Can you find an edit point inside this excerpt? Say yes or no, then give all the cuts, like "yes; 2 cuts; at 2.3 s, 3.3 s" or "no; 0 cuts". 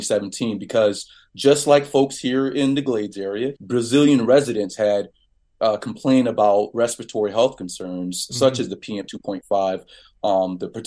yes; 1 cut; at 3.6 s